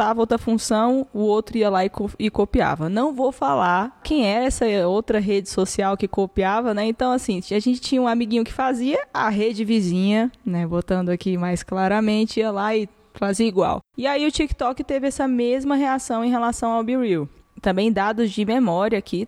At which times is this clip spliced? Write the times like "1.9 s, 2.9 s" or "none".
none

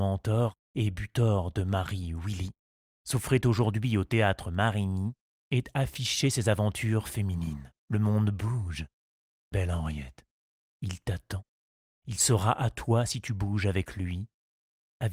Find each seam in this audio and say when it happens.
7.8 s

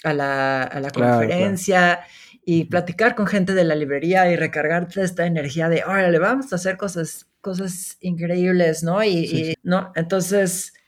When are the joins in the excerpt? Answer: 9.5 s

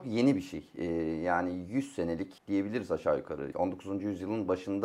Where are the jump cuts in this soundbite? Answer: 2.4 s, 3.5 s

